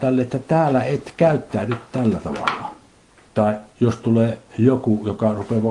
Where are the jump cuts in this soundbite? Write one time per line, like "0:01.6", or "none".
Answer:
0:03.3